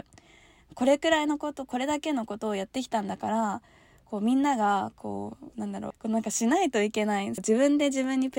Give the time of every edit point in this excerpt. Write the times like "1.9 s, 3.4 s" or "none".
5.9 s, 7.4 s